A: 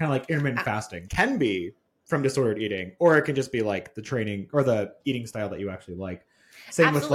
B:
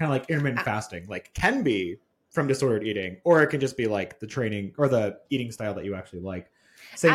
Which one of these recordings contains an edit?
A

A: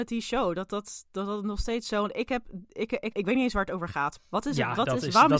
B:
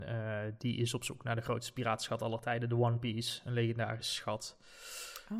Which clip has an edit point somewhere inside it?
A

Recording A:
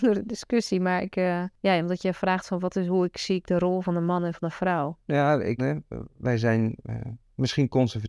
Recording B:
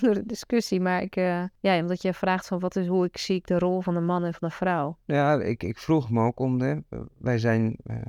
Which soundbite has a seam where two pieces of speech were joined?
A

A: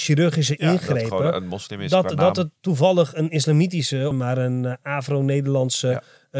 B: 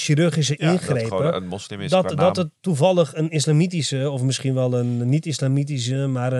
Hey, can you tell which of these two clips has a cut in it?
A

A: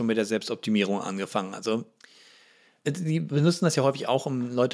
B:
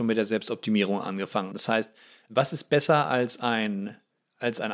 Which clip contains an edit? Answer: B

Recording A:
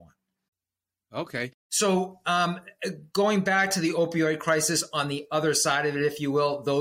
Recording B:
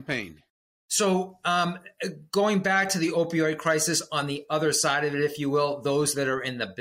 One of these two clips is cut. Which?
A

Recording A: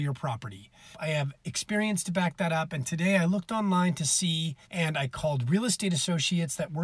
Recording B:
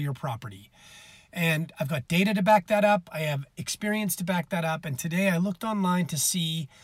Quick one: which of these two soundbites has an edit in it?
A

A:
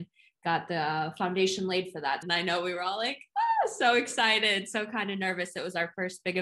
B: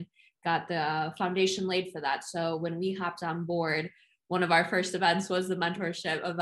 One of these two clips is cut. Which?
A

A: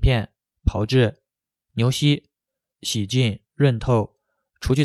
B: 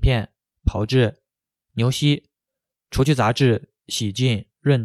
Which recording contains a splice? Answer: A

